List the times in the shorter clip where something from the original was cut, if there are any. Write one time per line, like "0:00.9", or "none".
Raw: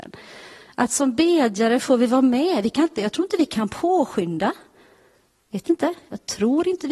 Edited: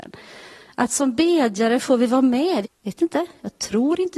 0:02.6